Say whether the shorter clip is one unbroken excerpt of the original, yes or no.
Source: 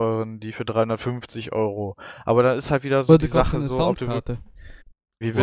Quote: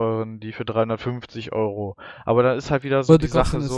yes